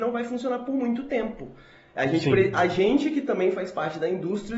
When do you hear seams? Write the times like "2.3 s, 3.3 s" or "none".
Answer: none